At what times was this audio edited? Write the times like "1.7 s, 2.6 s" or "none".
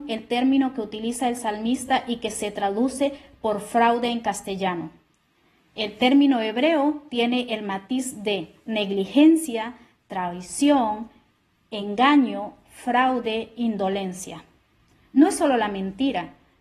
none